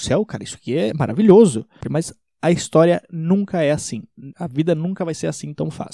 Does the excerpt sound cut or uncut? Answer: cut